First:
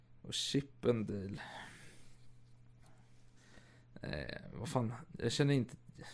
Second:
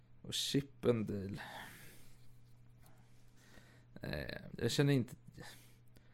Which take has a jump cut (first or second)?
second